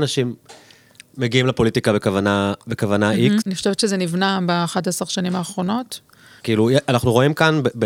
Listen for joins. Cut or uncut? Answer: cut